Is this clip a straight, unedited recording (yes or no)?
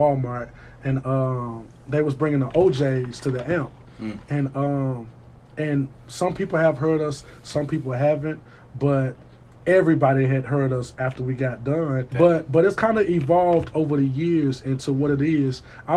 no